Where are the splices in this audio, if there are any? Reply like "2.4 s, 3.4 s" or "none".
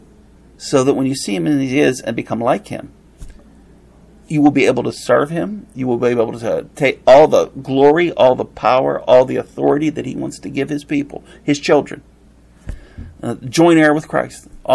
none